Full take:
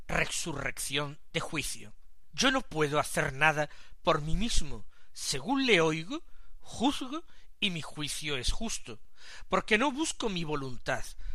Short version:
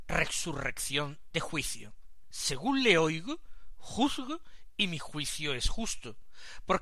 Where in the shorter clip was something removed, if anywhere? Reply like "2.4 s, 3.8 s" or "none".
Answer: 2.3 s